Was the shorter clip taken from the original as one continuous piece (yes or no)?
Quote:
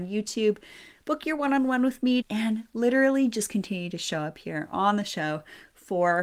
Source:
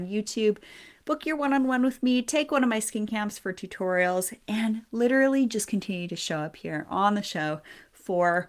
no